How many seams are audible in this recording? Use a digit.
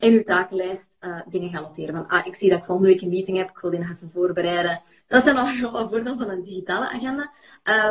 1